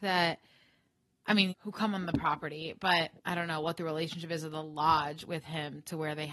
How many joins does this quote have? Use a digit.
2